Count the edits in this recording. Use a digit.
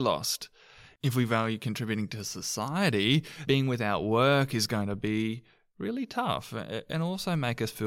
1